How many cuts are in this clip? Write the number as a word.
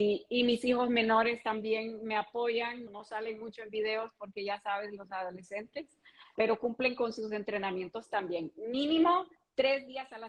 two